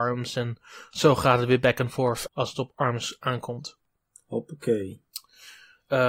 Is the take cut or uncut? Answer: cut